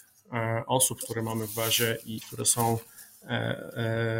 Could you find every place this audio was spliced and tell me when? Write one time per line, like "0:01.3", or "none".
0:02.2